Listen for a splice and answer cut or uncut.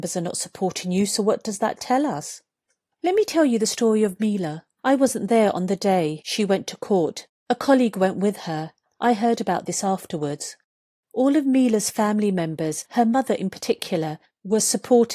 uncut